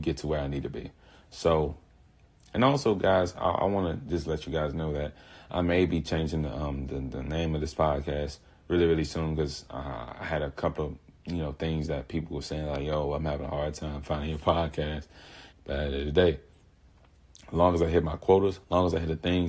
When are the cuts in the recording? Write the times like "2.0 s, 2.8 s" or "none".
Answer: 15.5 s